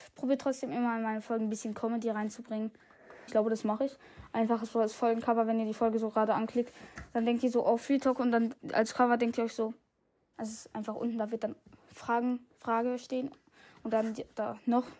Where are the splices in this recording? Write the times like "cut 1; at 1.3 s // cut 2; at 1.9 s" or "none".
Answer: cut 1; at 3.3 s // cut 2; at 10.3 s

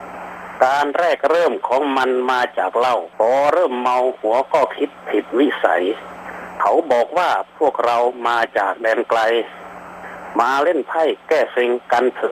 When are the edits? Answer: cut 1; at 3.1 s

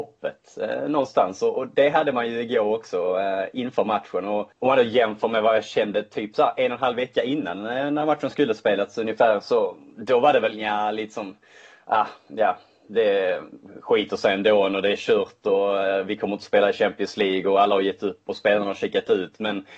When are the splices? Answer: cut 1; at 4.5 s

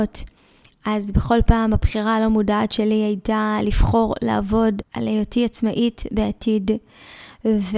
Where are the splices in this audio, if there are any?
cut 1; at 4.8 s

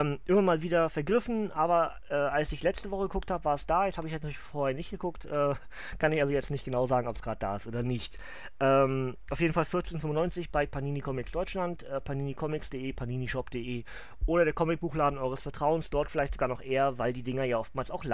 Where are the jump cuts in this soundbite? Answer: none

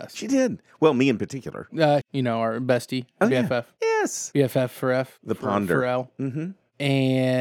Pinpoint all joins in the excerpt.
cut 1; at 2.0 s

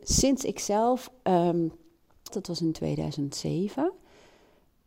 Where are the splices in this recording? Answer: cut 1; at 2.3 s

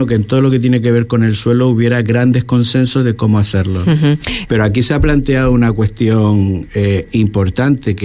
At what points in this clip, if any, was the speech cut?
cut 1; at 4.5 s

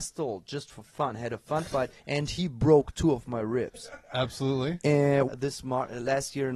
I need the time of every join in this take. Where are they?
cut 1; at 4.1 s // cut 2; at 5.3 s

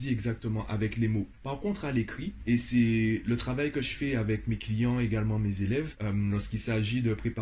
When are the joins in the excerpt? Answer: none

